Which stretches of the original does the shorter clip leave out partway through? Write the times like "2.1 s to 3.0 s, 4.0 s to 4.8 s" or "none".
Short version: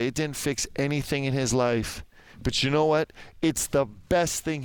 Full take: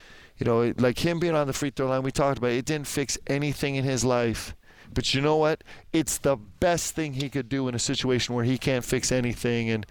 none

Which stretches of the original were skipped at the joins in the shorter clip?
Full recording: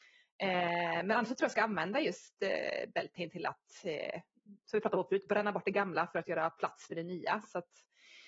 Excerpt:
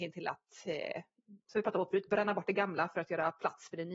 none

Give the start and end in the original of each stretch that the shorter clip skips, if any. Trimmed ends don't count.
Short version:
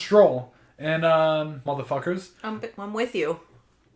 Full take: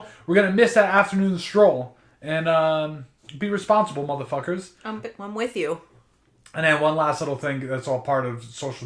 3.1 s to 4.1 s

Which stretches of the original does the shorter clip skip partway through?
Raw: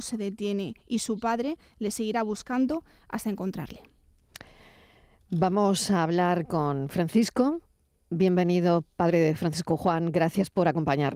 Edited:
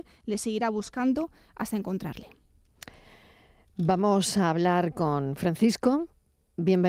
none

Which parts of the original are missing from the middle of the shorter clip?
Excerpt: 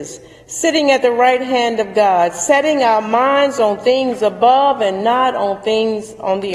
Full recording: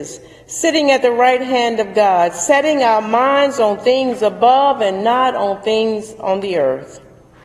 none

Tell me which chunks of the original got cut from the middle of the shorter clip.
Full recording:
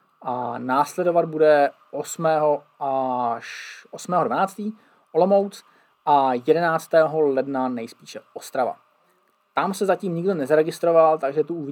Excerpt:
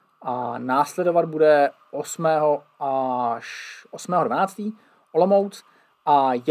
none

